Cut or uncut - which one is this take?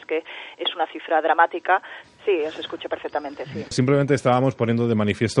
cut